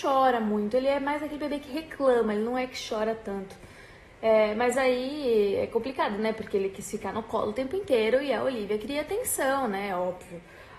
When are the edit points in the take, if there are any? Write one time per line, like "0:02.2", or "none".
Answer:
none